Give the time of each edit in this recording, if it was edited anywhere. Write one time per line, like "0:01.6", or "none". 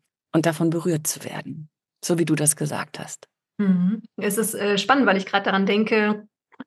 none